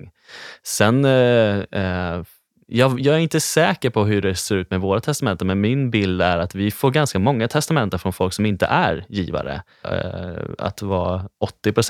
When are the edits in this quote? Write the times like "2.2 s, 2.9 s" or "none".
9.8 s